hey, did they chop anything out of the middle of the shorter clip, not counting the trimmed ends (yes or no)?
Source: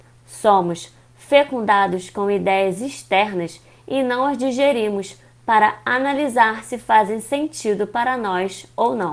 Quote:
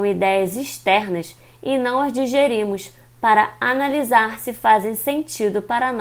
no